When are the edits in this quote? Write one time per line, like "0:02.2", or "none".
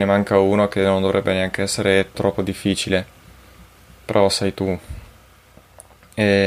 0:02.1